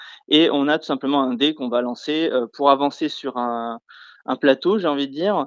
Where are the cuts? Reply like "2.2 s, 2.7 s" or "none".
none